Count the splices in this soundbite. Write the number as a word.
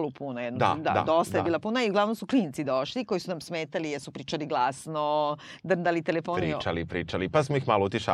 zero